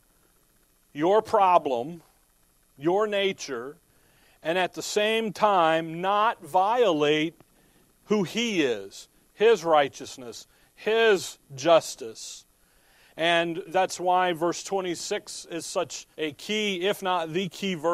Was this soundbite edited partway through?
yes; 2 cuts; at 13.7 s, 16.1 s

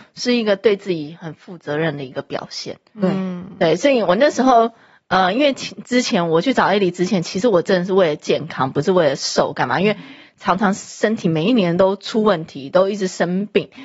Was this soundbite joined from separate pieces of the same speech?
no; 0 cuts

